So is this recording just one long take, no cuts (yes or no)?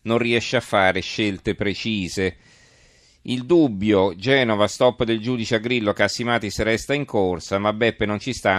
yes